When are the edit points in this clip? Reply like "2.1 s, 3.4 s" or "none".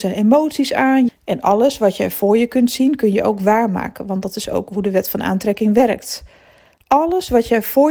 1.1 s